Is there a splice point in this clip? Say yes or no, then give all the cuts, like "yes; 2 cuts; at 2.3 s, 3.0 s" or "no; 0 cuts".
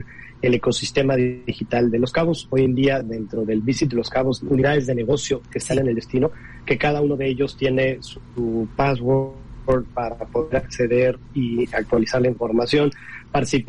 yes; 1 cut; at 4.4 s